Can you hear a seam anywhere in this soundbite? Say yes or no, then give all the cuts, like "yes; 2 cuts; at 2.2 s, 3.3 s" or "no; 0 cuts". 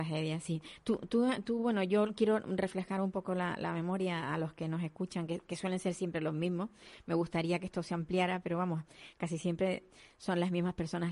no; 0 cuts